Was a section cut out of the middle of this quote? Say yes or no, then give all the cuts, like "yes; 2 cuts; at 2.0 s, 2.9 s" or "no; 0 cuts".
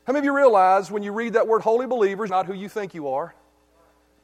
yes; 1 cut; at 2.3 s